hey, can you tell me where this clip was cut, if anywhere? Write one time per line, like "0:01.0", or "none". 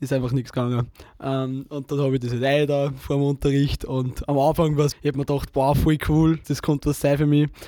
0:04.9
0:06.4

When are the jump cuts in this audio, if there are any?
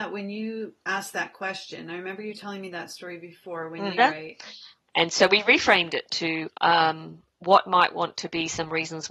0:04.0
0:06.5

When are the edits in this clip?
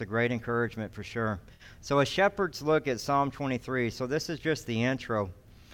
none

